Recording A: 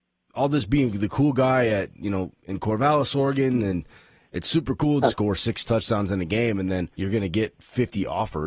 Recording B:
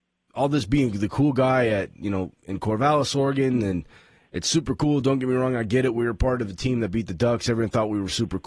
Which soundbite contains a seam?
A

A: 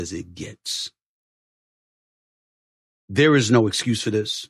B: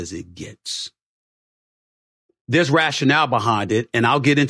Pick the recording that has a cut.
B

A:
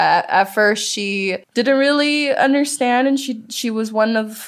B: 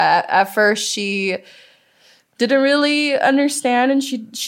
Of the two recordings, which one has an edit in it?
A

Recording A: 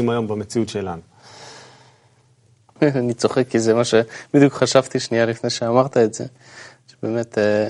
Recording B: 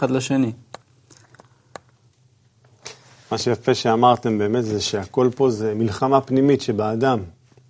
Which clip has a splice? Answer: A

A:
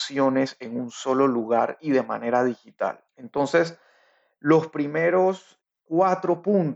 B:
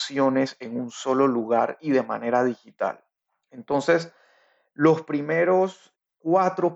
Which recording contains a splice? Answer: A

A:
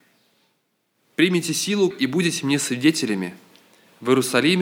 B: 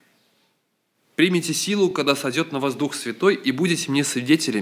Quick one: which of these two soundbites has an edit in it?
A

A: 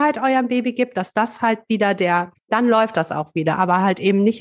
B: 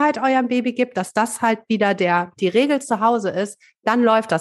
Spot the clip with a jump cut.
A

